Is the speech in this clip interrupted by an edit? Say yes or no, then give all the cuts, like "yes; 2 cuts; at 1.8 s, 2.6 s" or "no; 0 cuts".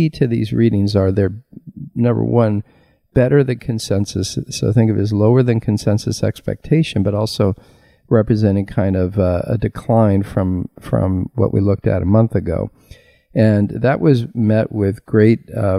no; 0 cuts